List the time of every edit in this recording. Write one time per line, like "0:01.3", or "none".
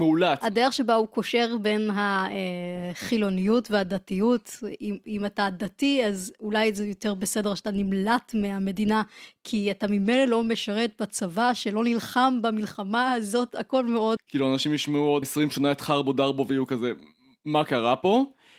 0:14.2
0:15.2